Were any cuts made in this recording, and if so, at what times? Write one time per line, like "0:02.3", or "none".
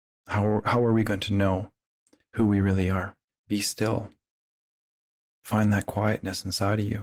0:03.3